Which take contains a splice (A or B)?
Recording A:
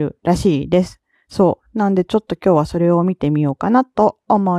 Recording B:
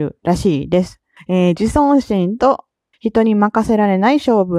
B